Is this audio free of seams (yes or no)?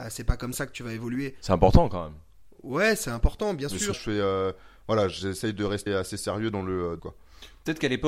no